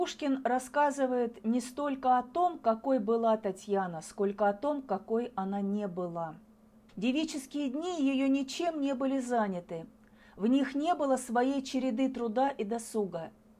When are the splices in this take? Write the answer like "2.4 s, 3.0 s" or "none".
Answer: 6.9 s